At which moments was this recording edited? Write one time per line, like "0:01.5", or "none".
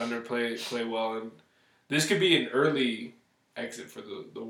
none